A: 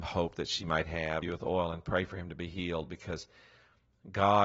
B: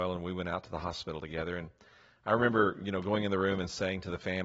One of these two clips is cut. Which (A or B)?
A